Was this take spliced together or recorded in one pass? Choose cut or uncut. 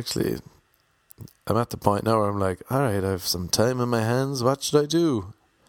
uncut